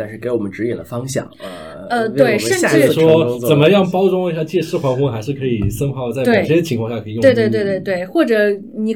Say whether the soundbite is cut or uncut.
uncut